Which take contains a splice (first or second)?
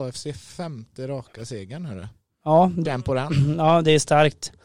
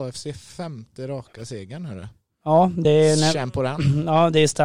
first